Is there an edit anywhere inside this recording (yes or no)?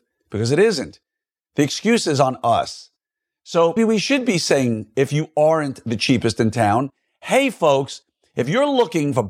yes